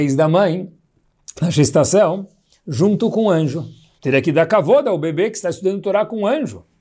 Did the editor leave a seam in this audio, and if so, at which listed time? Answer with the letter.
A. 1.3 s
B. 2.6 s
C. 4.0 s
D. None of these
C